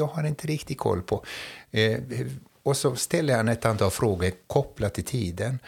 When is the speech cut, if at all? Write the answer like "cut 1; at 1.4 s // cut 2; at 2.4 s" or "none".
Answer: none